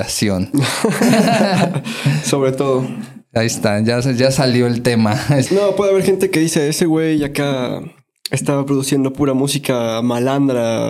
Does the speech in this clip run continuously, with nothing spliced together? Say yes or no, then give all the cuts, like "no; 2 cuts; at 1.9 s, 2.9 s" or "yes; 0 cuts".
no; 1 cut; at 5.4 s